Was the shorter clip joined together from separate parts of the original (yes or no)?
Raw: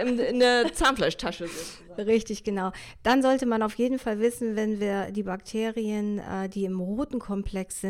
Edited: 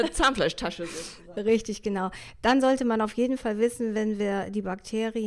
no